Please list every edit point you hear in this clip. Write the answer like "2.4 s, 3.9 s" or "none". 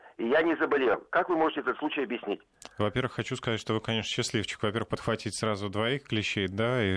none